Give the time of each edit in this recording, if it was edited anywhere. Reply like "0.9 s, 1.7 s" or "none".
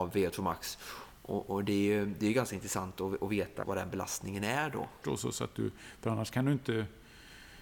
3.6 s, 5.0 s

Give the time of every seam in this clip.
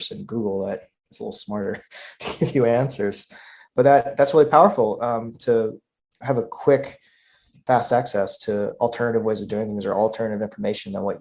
none

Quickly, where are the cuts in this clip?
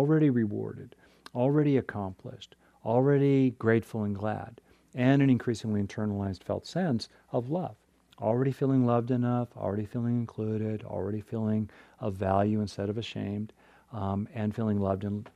none

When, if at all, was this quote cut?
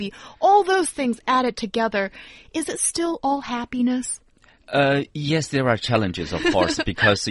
none

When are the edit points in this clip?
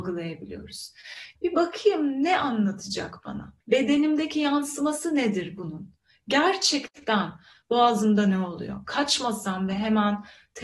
1.4 s, 3.6 s

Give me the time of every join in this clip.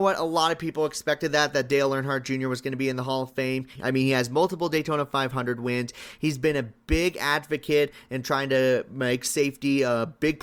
3.8 s

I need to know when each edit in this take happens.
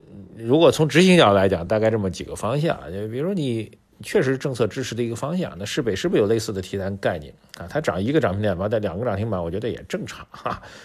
none

